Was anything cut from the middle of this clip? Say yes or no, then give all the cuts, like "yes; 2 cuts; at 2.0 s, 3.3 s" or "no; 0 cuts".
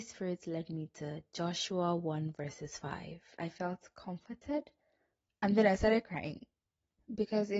yes; 1 cut; at 3.4 s